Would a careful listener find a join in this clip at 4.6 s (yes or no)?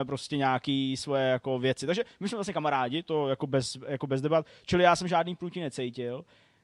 no